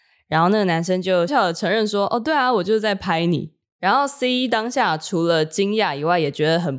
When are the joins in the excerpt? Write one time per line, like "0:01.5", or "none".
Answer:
0:01.3